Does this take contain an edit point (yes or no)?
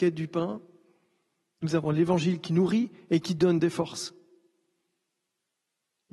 no